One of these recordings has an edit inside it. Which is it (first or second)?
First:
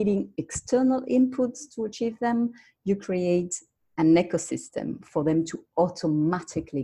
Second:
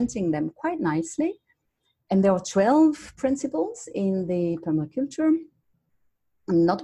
second